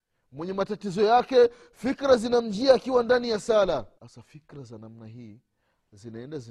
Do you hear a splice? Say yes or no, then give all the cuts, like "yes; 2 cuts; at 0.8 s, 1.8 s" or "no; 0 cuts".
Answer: yes; 1 cut; at 3.9 s